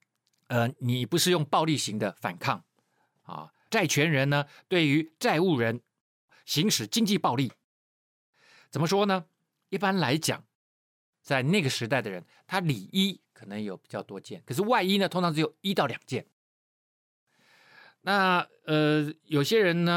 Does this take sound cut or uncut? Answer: cut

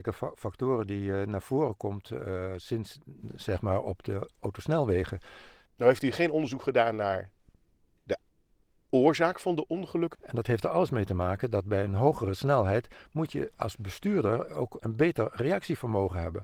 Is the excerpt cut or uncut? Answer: cut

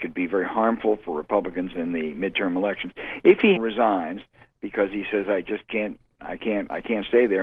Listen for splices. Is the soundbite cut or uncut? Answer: cut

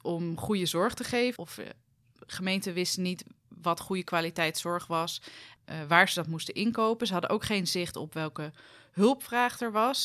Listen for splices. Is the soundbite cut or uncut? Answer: cut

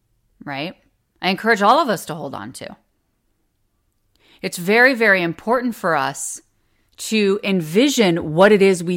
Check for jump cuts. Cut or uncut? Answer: cut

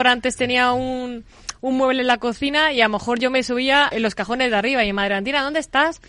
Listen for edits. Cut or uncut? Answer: cut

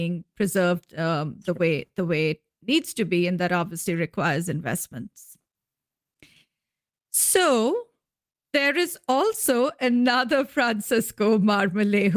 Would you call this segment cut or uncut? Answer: uncut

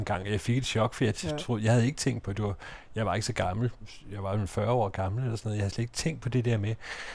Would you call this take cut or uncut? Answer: uncut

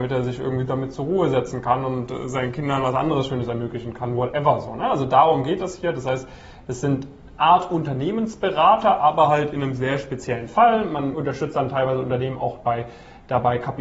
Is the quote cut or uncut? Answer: cut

